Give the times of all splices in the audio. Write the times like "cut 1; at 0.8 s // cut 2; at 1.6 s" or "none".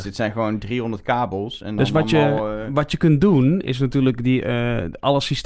none